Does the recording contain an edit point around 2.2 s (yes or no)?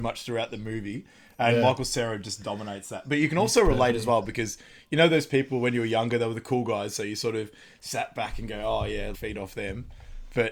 no